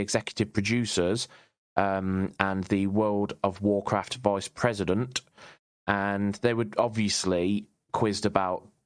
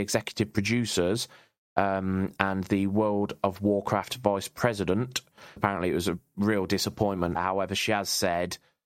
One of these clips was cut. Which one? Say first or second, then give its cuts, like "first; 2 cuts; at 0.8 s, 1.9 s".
second; 2 cuts; at 5.6 s, 7.4 s